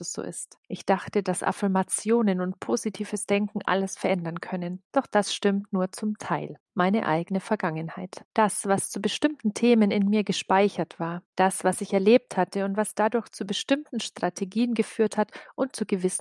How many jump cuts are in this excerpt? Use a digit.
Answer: 0